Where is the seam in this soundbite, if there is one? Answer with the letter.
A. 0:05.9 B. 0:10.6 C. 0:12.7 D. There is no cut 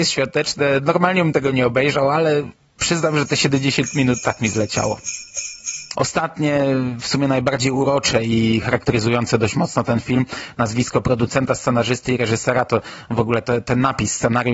A